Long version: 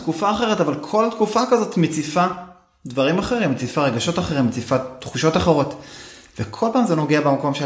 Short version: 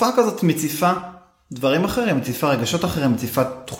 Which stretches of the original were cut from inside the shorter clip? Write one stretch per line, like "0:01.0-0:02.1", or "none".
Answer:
none